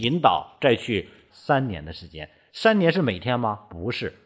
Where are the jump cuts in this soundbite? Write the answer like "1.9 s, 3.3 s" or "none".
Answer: 1.3 s